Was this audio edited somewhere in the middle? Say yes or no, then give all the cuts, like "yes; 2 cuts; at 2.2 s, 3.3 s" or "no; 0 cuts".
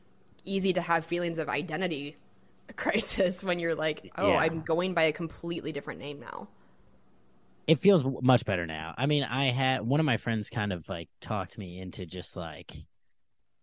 no; 0 cuts